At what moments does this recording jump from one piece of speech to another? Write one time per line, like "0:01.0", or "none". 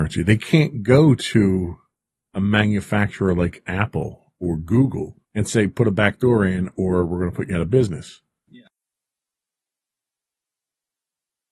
0:05.2
0:08.5